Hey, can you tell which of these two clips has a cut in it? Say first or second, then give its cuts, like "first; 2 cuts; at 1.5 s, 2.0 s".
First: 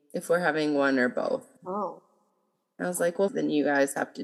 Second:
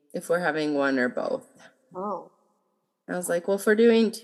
first; 2 cuts; at 1.6 s, 3.3 s